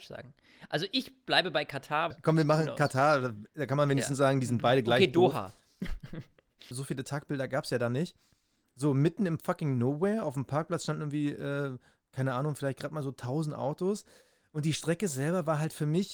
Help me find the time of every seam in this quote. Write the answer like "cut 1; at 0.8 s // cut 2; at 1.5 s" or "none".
cut 1; at 2.1 s // cut 2; at 6.7 s